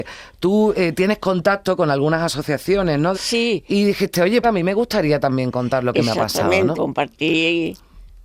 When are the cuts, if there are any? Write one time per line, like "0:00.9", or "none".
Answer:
0:03.1
0:04.4
0:06.7